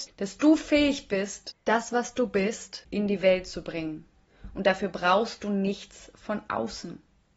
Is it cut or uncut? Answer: cut